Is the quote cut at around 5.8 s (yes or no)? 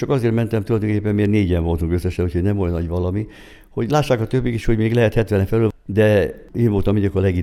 no